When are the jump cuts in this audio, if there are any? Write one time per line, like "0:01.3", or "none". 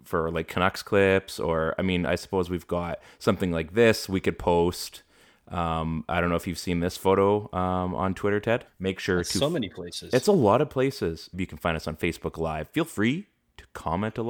0:08.7
0:11.3